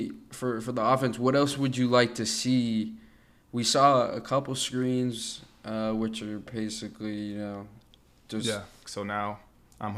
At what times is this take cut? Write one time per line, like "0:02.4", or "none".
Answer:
0:08.8